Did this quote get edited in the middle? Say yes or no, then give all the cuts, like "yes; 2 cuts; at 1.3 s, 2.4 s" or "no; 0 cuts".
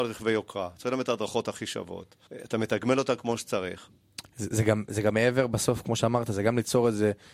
yes; 1 cut; at 2.3 s